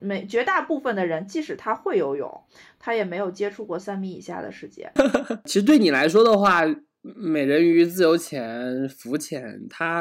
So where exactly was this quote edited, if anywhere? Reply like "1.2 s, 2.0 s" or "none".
5.0 s

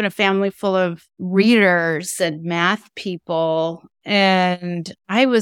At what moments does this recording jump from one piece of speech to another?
none

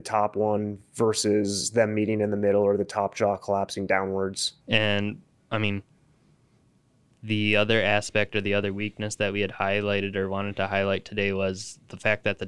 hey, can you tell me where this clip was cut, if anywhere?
4.6 s

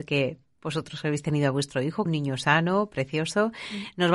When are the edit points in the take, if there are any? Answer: 2.1 s

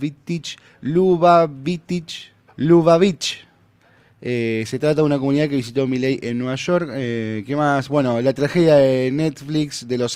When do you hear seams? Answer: 2.5 s

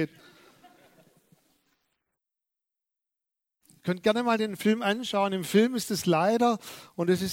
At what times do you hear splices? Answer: none

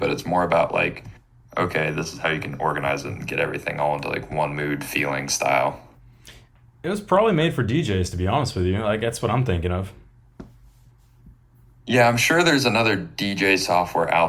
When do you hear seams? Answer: none

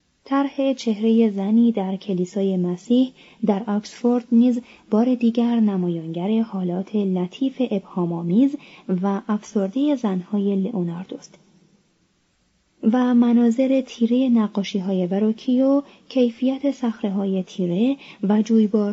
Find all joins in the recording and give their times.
none

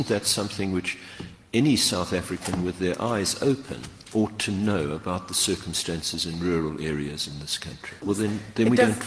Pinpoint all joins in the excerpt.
8.0 s

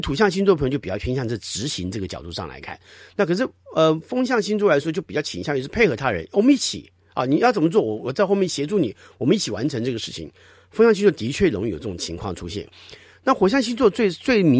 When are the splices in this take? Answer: none

